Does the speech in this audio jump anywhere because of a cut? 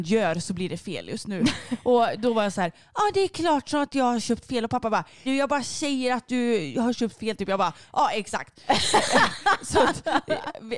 yes; 1 cut; at 5.3 s

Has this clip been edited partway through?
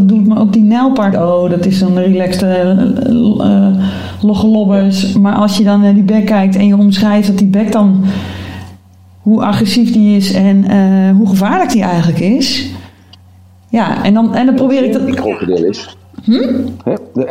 yes; 1 cut; at 1.1 s

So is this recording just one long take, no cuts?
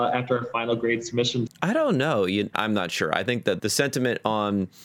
no; 3 cuts; at 1.5 s, 2.5 s, 3.6 s

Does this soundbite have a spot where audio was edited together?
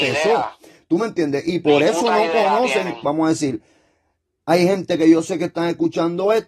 yes; 1 cut; at 3.0 s

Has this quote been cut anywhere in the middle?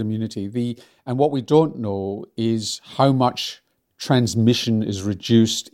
no; 0 cuts

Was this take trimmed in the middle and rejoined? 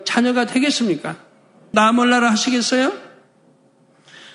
yes; 1 cut; at 1.7 s

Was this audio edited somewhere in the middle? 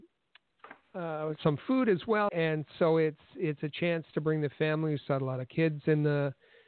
yes; 1 cut; at 2.3 s

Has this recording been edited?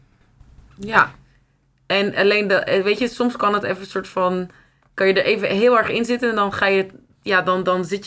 no; 0 cuts

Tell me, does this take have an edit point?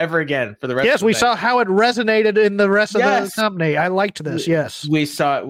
no; 0 cuts

